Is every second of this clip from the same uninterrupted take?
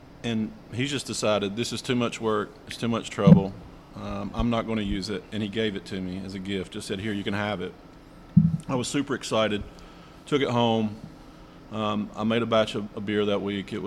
yes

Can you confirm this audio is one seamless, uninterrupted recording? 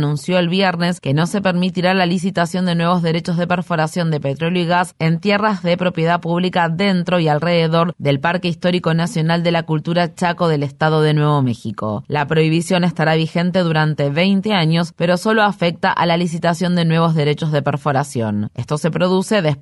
yes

